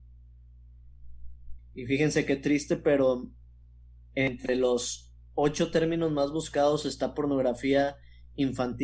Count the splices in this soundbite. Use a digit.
1